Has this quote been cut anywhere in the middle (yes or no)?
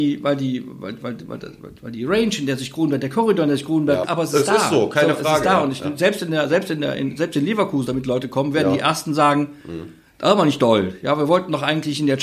yes